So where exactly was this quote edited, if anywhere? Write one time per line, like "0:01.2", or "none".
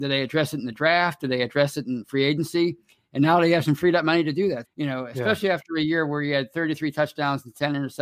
0:04.6